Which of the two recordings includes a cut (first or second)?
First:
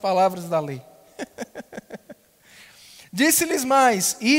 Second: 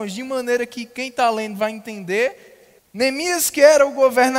second